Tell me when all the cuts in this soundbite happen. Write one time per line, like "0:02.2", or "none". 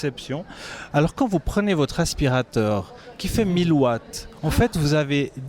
0:00.9